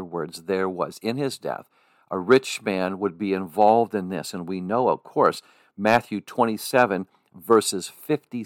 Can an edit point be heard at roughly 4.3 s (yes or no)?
no